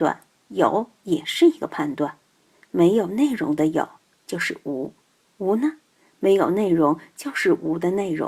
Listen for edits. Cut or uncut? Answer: uncut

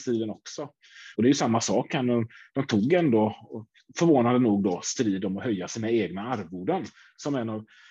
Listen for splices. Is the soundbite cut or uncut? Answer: cut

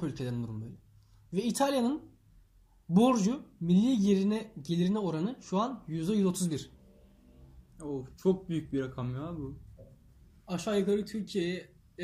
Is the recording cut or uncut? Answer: uncut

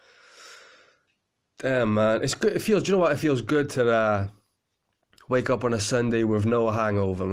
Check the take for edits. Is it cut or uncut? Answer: uncut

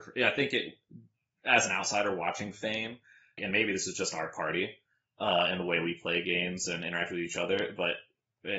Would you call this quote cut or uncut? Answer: cut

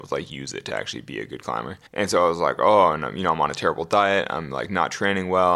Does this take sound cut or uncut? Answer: cut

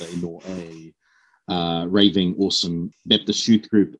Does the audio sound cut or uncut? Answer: uncut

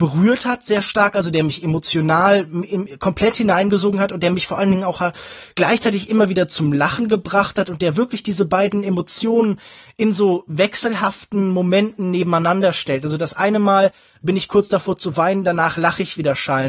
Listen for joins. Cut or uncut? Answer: uncut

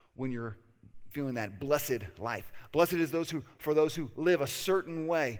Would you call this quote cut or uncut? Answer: uncut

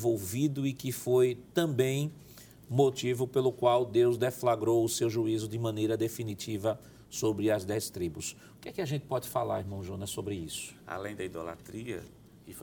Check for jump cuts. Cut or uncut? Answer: uncut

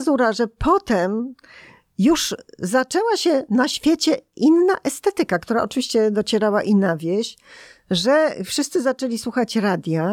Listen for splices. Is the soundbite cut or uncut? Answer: uncut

